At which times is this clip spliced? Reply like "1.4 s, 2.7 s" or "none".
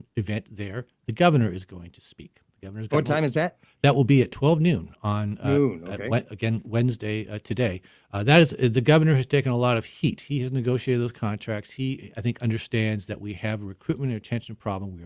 none